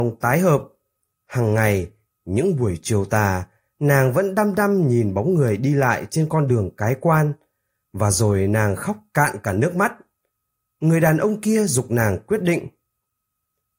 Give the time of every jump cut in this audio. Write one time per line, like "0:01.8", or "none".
0:01.1